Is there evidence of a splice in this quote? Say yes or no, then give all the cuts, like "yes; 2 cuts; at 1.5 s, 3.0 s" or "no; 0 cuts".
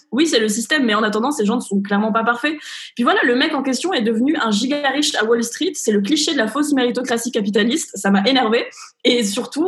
no; 0 cuts